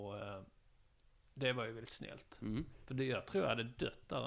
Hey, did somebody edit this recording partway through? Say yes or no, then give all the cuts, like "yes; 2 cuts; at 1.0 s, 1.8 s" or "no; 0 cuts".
no; 0 cuts